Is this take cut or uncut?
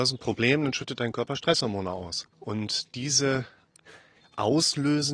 cut